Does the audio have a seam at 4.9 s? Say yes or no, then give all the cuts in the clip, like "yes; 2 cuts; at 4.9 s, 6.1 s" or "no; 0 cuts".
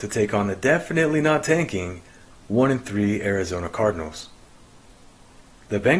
no; 0 cuts